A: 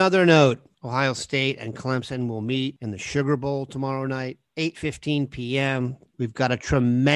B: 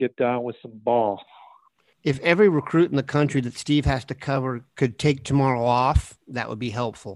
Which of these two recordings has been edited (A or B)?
A